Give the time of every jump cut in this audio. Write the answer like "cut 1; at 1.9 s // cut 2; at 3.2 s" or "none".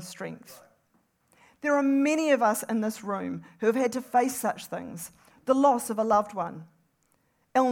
none

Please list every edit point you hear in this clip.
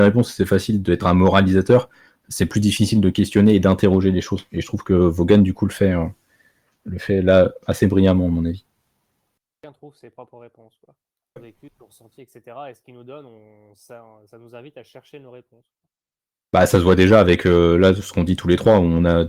cut 1; at 11.4 s

